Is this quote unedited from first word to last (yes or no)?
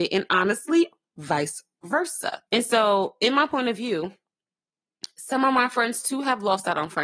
no